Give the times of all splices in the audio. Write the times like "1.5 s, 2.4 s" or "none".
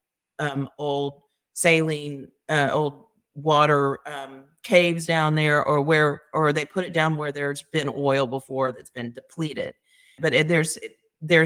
10.2 s